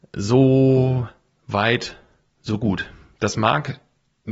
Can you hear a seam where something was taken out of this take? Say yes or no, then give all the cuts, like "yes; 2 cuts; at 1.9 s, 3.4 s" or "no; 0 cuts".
no; 0 cuts